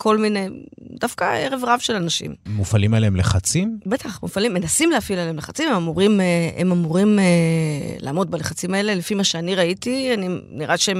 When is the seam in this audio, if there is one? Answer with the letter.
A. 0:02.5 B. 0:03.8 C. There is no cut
A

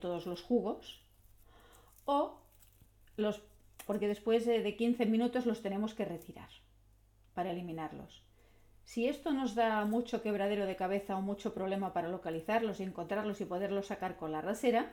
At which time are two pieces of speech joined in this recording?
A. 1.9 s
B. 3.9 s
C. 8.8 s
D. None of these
B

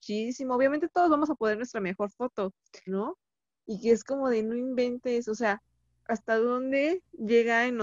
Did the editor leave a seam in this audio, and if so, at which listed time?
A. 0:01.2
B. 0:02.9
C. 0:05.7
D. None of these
B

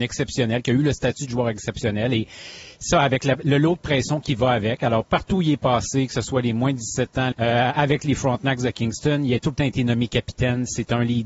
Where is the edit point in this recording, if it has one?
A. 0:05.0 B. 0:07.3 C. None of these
B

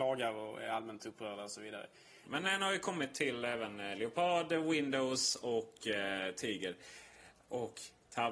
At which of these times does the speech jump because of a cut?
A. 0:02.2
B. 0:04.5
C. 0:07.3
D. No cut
A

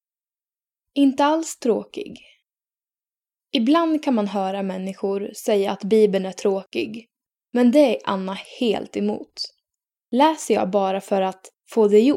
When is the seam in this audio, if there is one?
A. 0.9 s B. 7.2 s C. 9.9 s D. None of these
C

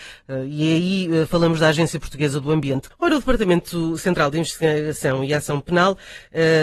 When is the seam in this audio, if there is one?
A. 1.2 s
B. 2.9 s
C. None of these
B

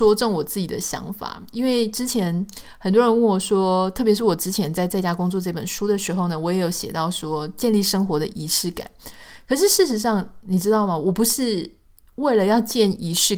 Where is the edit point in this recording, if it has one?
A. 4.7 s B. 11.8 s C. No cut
C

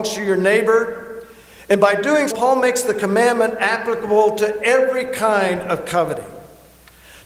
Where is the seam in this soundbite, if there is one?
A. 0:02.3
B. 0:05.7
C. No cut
A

